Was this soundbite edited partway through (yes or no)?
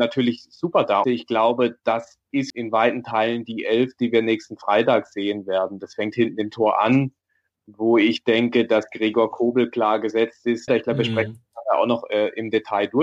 yes